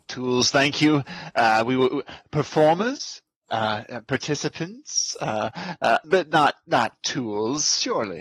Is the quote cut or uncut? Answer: cut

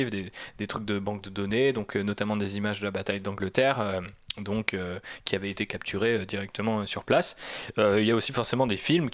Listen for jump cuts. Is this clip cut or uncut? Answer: uncut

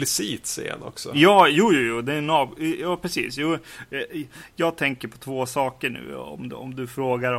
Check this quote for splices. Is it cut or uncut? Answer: uncut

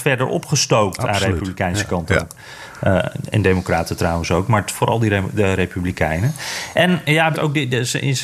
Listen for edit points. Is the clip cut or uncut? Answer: cut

